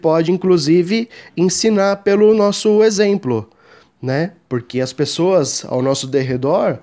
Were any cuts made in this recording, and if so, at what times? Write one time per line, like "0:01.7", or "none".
none